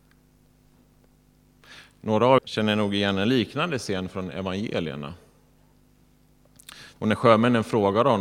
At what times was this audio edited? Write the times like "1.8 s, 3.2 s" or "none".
2.4 s, 7.0 s